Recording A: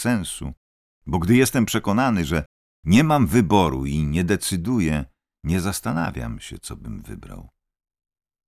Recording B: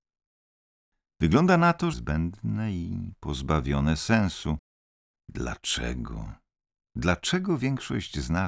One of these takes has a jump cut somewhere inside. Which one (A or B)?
B